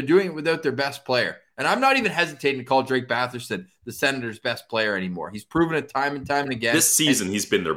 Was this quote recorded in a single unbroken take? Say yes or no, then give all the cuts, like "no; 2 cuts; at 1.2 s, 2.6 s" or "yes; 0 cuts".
yes; 0 cuts